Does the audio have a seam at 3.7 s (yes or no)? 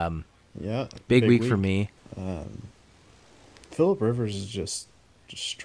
no